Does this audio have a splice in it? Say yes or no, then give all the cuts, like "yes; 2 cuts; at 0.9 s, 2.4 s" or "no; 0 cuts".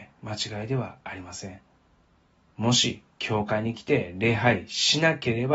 yes; 1 cut; at 2.5 s